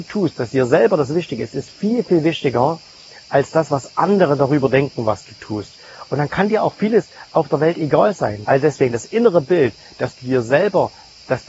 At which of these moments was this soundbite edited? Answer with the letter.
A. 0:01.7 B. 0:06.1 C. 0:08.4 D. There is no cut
C